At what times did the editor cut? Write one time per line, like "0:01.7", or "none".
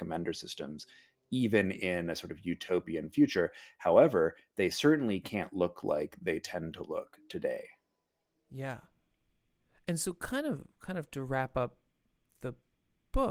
none